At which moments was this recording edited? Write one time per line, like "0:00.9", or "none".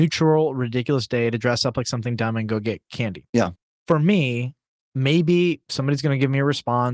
none